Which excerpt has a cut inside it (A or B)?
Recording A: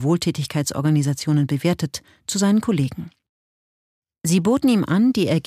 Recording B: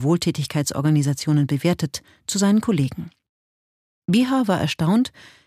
B